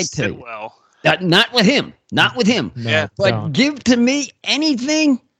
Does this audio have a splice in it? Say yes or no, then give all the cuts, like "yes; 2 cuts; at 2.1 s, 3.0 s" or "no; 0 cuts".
no; 0 cuts